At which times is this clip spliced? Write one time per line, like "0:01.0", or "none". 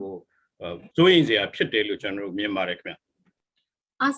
0:00.9